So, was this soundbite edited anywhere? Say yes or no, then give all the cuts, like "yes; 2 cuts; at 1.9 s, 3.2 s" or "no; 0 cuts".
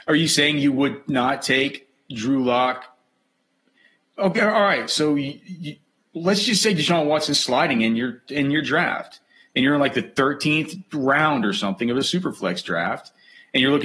no; 0 cuts